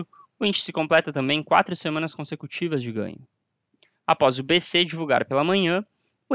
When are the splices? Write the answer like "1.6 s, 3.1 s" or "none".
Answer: 3.9 s